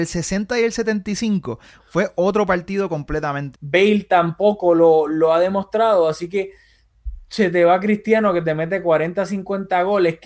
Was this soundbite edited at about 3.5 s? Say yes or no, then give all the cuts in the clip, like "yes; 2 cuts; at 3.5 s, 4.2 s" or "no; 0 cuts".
yes; 1 cut; at 3.5 s